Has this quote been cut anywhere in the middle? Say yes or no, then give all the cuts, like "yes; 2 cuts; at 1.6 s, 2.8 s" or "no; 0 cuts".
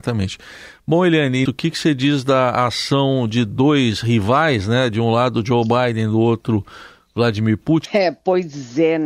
yes; 2 cuts; at 1.5 s, 7.9 s